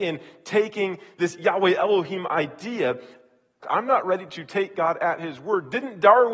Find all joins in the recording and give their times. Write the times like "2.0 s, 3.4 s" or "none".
3.6 s